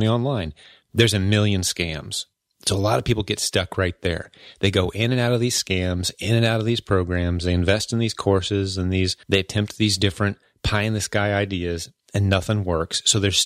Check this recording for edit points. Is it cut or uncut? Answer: cut